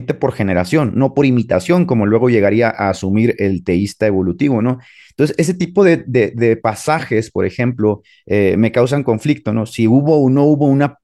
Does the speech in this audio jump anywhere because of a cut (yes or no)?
no